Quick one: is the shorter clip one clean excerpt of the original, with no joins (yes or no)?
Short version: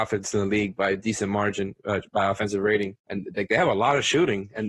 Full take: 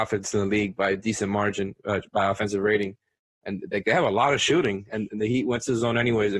no